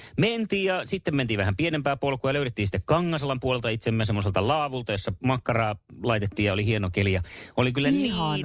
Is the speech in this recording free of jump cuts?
yes; 0 cuts

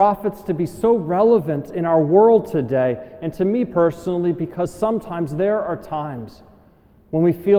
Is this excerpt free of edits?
yes; 0 cuts

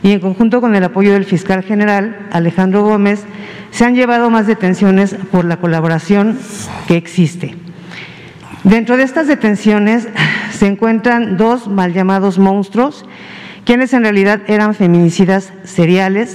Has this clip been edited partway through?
no; 0 cuts

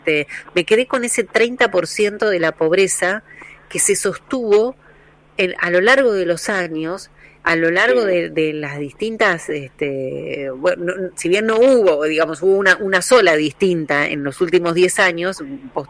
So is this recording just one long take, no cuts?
yes; 0 cuts

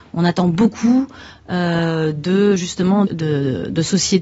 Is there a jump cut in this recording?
yes; 1 cut; at 3.1 s

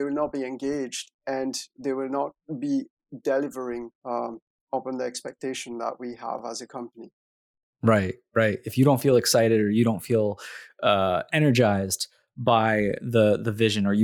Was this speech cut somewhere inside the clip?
yes; 1 cut; at 4.0 s

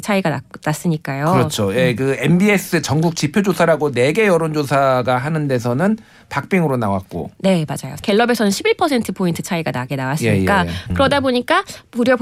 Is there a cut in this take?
yes; 1 cut; at 10.9 s

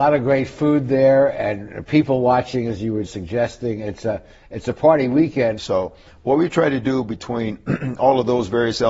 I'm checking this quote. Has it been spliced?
yes; 2 cuts; at 3.1 s, 5.6 s

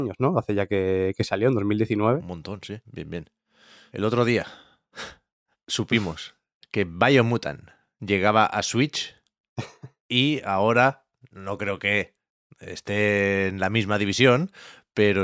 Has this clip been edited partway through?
yes; 1 cut; at 2.8 s

